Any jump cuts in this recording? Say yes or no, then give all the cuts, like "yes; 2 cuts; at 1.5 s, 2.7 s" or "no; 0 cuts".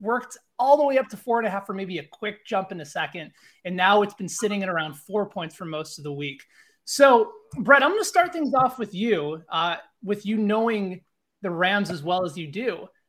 no; 0 cuts